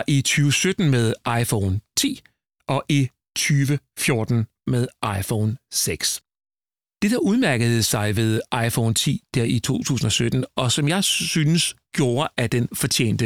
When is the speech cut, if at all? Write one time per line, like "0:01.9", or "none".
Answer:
none